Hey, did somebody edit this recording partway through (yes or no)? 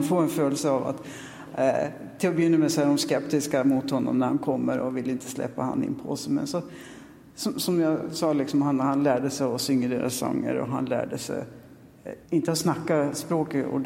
yes